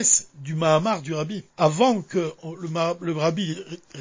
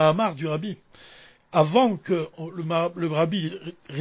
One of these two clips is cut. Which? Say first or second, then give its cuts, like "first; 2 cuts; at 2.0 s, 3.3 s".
first; 1 cut; at 1.5 s